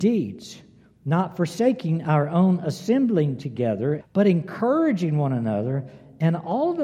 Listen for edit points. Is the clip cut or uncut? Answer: cut